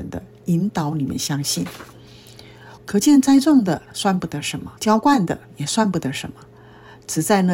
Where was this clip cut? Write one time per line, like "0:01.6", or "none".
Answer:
0:02.8
0:04.8

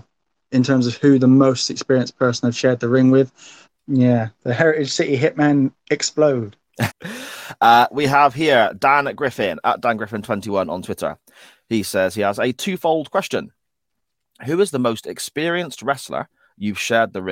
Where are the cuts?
0:03.7
0:06.9

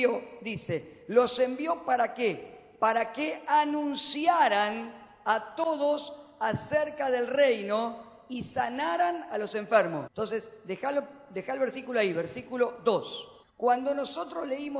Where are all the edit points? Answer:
0:10.1
0:13.4

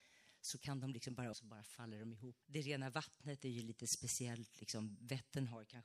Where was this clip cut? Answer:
0:01.3
0:02.4

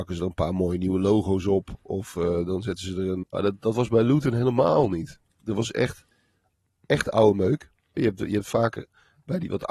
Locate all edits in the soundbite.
0:03.2
0:08.0

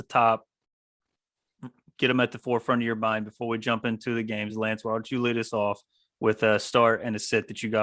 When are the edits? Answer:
none

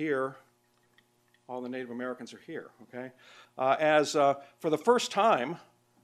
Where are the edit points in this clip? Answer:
0:03.4

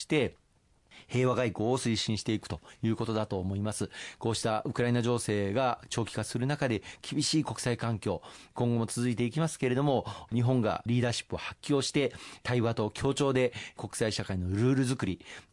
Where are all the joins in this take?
none

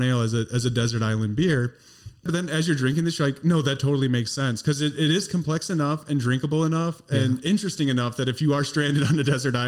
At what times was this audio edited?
0:02.3

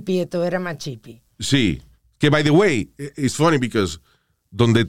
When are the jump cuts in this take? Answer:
none

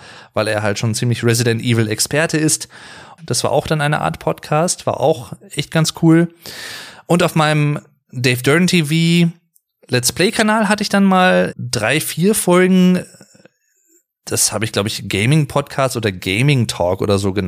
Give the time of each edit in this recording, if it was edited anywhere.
0:03.2
0:11.5

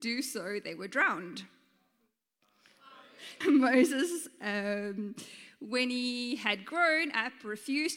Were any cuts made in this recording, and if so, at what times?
0:03.4

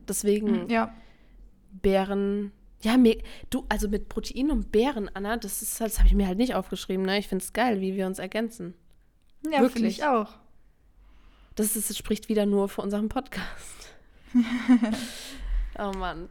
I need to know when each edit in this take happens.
none

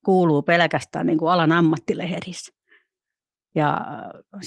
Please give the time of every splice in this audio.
none

